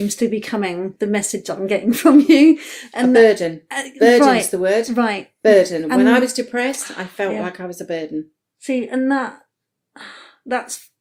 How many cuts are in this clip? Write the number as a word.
zero